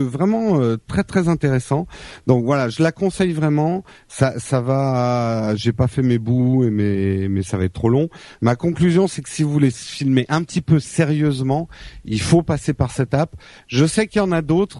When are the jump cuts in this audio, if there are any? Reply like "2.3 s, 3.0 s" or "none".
none